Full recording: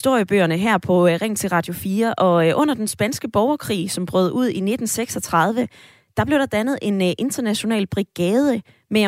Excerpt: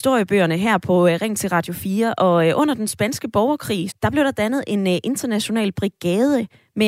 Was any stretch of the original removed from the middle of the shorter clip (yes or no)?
yes